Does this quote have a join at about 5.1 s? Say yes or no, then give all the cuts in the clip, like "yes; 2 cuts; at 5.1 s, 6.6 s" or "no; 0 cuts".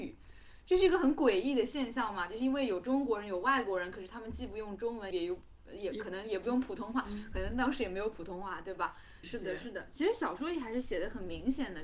yes; 2 cuts; at 5.1 s, 9.2 s